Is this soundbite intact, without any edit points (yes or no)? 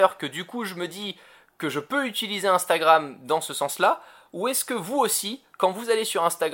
yes